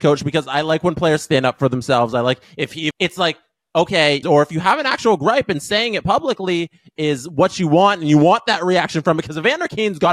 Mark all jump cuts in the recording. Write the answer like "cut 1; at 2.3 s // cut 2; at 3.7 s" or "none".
cut 1; at 2.9 s // cut 2; at 4.2 s